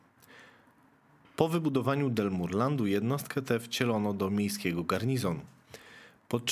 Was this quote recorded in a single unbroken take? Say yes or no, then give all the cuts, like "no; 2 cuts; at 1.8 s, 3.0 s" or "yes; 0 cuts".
yes; 0 cuts